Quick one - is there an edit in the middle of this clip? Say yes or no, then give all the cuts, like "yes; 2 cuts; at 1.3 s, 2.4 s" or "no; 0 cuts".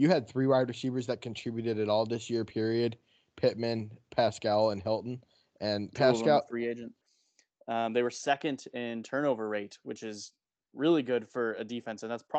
yes; 1 cut; at 7.0 s